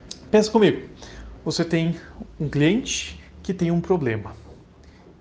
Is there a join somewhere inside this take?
no; 0 cuts

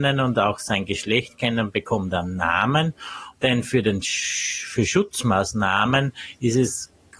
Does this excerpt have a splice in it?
yes; 1 cut; at 3.3 s

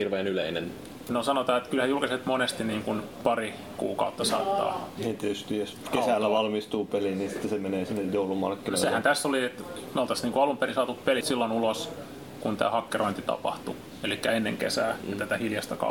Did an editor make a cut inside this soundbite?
yes; 1 cut; at 11.2 s

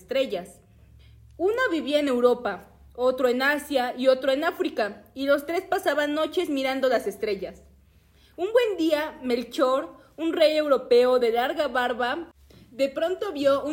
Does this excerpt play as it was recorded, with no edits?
yes; 0 cuts

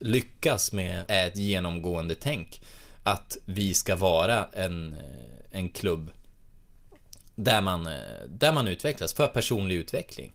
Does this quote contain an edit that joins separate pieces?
yes; 1 cut; at 1.1 s

